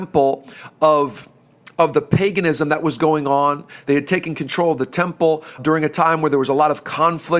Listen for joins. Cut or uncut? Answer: cut